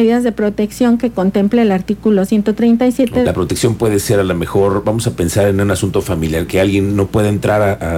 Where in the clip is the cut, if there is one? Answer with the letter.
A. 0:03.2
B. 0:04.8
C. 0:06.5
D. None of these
A